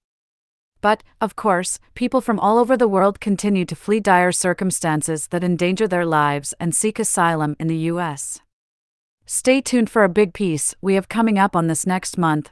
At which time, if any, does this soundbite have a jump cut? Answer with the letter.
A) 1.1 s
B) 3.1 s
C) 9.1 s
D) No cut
C